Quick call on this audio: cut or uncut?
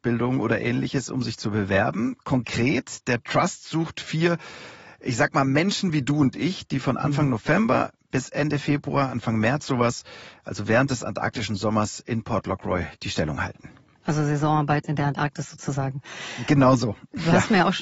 uncut